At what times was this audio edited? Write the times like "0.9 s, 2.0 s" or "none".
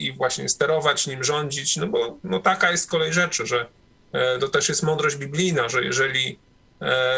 2.2 s